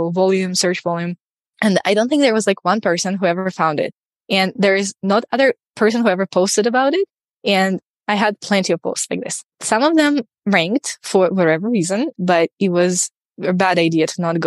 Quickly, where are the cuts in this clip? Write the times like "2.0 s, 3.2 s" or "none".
9.5 s, 12.1 s